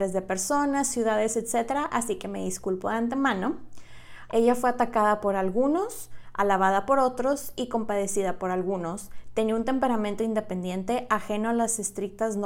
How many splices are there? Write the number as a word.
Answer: one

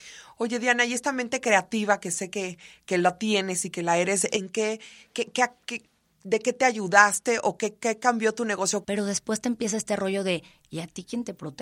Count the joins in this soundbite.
one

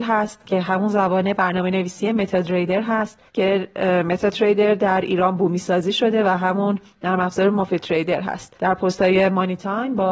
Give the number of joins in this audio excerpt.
two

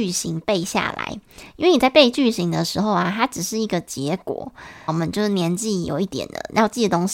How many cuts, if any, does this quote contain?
one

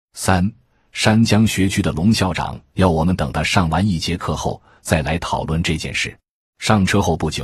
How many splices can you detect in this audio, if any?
one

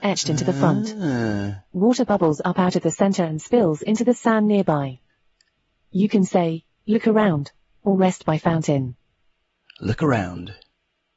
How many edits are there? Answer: zero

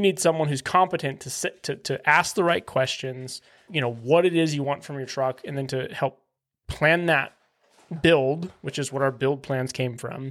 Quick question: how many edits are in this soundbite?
one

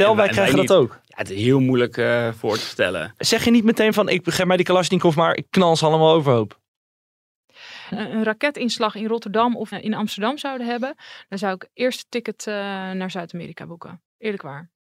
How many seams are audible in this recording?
two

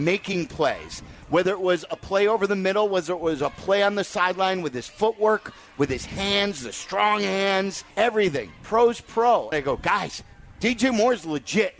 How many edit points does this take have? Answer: two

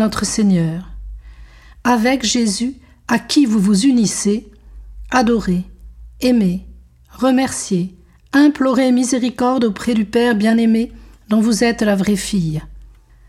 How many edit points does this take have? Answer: zero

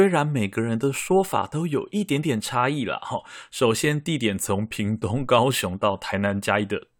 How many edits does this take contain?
zero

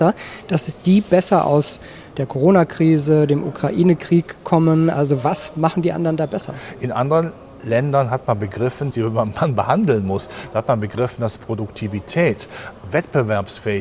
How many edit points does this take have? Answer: one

